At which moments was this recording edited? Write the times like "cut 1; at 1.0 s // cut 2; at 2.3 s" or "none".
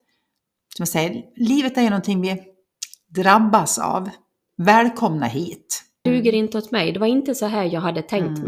cut 1; at 6.1 s